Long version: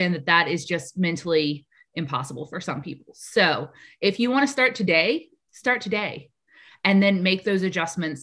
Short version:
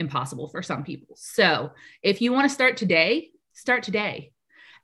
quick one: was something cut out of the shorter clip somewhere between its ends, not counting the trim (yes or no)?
no